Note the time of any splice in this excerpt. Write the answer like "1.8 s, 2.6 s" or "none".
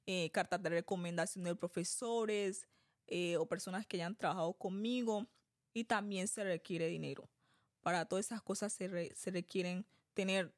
5.7 s, 9.1 s